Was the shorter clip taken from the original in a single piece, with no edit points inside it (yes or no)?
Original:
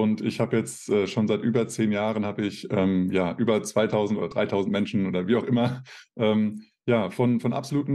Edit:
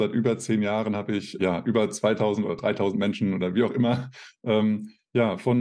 no